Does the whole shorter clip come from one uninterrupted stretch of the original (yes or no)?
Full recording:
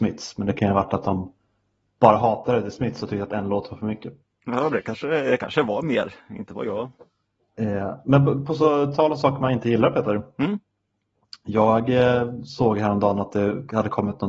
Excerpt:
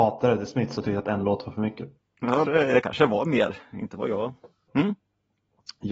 no